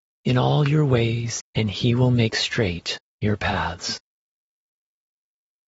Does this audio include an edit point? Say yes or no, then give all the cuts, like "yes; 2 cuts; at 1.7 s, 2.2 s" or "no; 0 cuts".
yes; 1 cut; at 1.4 s